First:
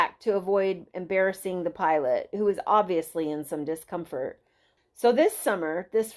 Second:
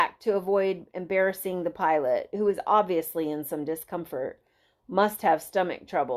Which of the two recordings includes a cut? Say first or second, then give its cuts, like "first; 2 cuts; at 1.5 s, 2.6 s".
first; 1 cut; at 4.8 s